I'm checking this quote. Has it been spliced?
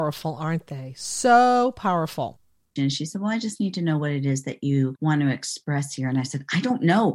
yes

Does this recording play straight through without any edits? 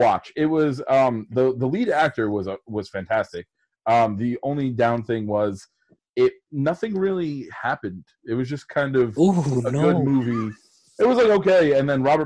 yes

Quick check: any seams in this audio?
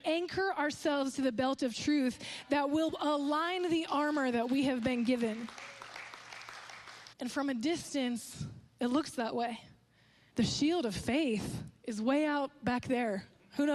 yes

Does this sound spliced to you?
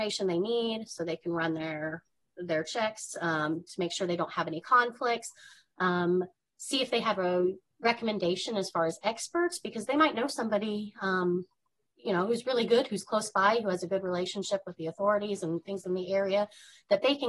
no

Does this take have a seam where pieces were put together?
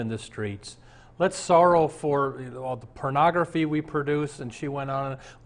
no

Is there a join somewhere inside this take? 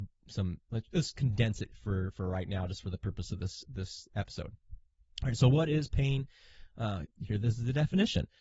yes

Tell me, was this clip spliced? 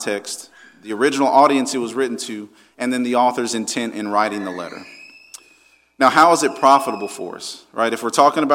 no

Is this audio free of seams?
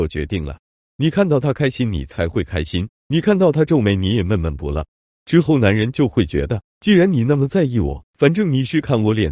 no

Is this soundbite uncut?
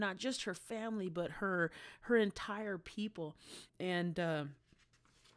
no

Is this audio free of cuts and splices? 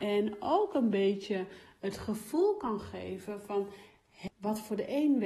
no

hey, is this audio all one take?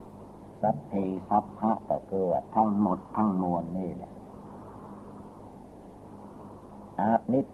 yes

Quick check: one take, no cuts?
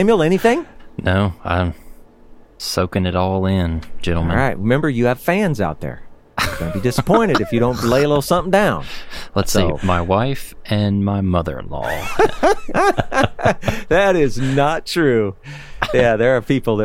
yes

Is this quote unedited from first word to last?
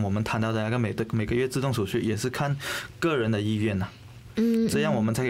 no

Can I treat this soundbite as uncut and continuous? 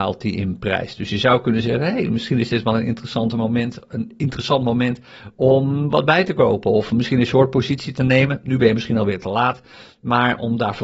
yes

